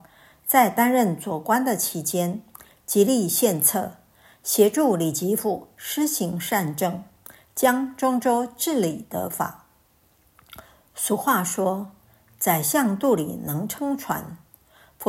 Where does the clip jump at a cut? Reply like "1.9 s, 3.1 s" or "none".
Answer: none